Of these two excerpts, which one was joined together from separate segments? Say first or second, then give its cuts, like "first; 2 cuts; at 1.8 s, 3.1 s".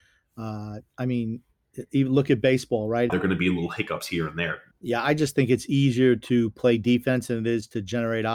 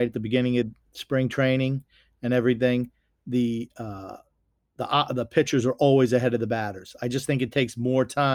first; 2 cuts; at 3.1 s, 4.7 s